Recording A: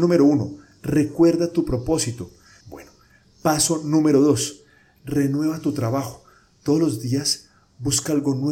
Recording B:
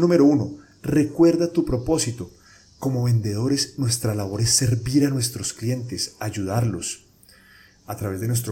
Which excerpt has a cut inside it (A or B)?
A